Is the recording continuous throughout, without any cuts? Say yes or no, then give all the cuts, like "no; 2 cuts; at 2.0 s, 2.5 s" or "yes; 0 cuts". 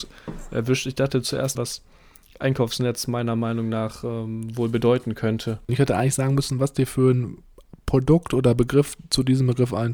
no; 2 cuts; at 1.6 s, 5.7 s